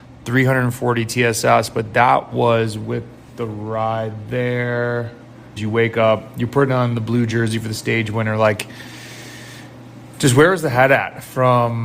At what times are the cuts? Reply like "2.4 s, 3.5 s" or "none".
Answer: 5.6 s